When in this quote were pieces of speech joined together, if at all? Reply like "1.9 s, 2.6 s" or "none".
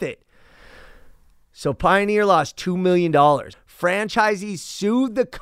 3.5 s